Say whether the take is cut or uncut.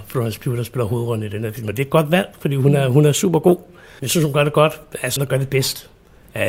cut